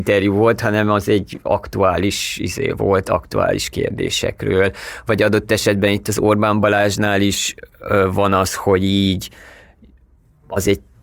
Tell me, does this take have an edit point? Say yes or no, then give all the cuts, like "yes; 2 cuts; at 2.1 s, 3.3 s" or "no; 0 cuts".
no; 0 cuts